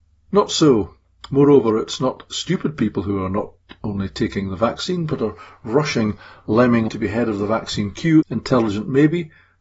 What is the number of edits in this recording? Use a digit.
2